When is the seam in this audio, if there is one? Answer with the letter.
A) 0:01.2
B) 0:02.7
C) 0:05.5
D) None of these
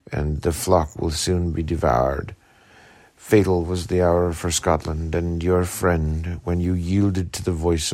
D